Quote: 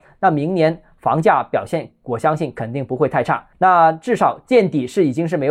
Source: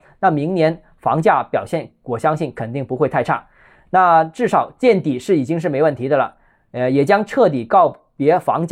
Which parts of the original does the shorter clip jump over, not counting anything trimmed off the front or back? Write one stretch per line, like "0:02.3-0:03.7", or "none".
0:03.5-0:03.8